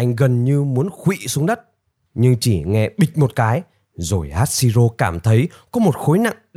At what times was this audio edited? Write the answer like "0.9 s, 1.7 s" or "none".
2.1 s